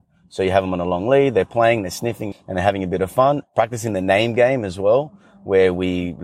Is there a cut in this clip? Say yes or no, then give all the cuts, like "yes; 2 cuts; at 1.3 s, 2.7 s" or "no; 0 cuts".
yes; 2 cuts; at 2.3 s, 3.4 s